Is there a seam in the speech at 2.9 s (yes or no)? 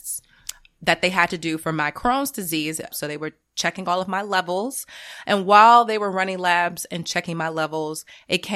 yes